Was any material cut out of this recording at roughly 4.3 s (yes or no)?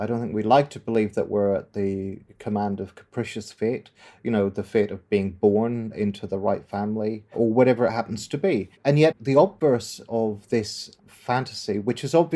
no